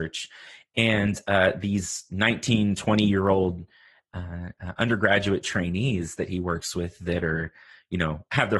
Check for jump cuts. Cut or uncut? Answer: uncut